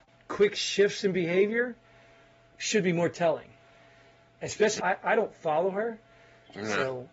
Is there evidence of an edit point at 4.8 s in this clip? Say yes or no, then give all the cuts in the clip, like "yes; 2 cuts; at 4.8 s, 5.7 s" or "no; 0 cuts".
yes; 1 cut; at 4.8 s